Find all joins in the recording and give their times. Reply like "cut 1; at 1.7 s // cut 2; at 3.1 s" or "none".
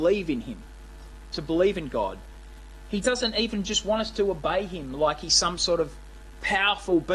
none